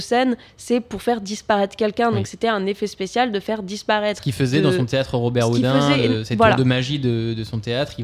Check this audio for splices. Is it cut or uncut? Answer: uncut